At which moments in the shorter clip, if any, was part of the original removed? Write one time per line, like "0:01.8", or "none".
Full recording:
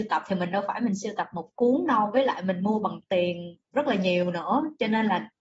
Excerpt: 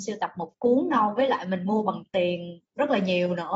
none